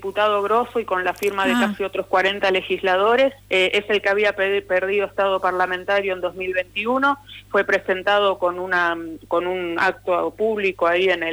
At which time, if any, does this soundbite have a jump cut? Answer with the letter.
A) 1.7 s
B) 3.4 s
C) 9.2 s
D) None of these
B